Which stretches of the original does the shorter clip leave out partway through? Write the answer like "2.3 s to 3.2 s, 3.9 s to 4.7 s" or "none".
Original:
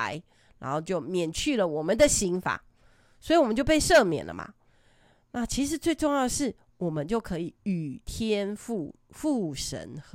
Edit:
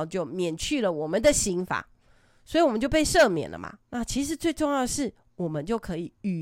4.6 s to 5.2 s

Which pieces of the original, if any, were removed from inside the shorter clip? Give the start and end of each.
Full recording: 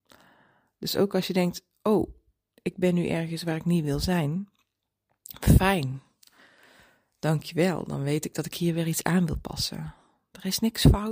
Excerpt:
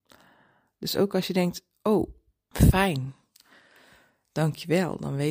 2.5 s to 5.4 s

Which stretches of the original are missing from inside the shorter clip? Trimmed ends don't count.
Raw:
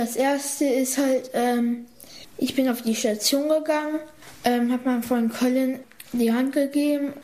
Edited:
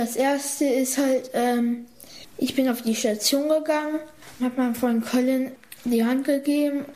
4.4 s to 4.7 s

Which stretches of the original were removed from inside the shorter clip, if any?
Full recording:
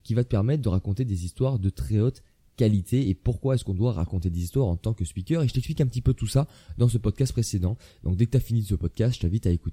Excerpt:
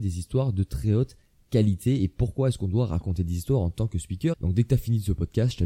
5.4 s to 7.9 s

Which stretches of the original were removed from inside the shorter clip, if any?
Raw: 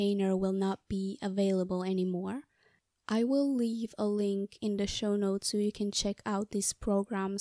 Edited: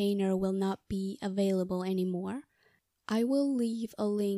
none

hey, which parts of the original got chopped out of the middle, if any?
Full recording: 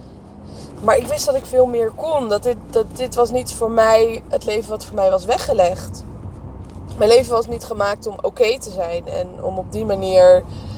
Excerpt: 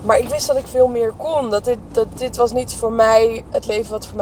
none

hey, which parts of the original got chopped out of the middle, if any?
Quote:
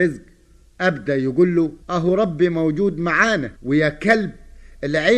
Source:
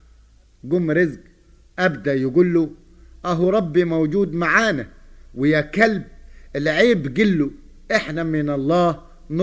2.8 s to 3.2 s, 4.9 s to 5.3 s

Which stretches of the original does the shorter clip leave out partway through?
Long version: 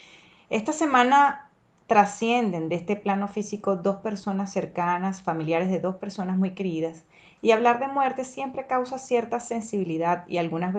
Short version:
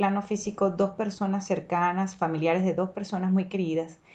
none

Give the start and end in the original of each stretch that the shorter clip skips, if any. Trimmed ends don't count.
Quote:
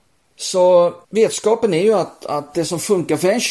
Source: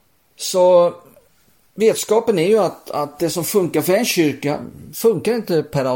1.0 s to 1.7 s

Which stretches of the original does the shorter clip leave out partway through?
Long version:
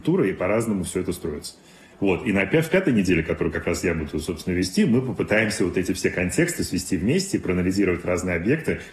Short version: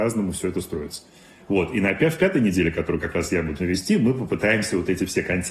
4.1 s to 4.5 s

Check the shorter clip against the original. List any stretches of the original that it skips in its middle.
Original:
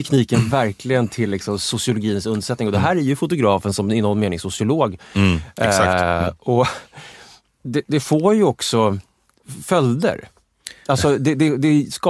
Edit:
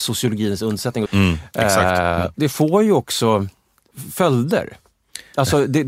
2.7 s to 5.1 s, 6.4 s to 7.9 s

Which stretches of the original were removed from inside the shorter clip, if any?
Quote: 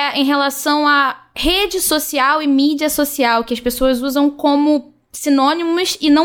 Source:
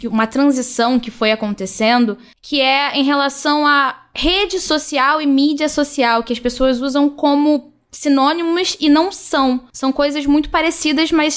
none

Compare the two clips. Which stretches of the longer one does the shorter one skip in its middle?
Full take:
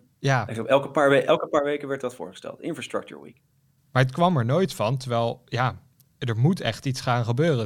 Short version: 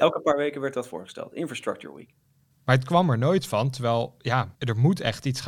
5.8 s to 6.2 s

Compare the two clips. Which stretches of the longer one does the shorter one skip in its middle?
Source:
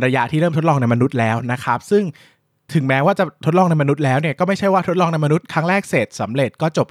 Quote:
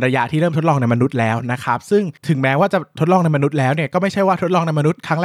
2.2 s to 2.6 s

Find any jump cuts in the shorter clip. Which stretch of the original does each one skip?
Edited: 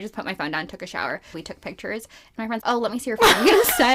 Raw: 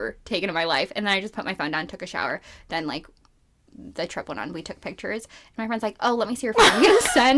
2.5 s to 4.5 s, 5.8 s to 6.0 s

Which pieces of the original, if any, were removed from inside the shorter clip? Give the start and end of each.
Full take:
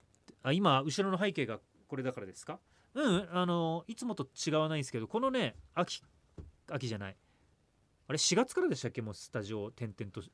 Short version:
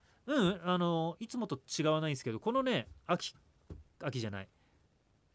none

